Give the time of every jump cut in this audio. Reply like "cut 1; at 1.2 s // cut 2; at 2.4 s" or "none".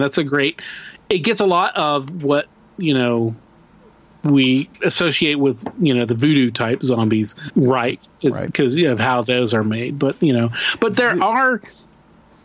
cut 1; at 7.5 s